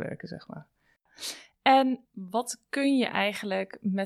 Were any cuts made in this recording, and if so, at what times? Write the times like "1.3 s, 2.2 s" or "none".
2.0 s